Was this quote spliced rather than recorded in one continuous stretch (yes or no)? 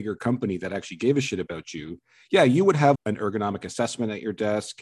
yes